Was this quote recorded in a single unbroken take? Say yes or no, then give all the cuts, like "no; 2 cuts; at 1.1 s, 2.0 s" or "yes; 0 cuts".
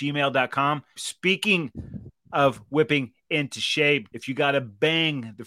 no; 2 cuts; at 1.0 s, 4.1 s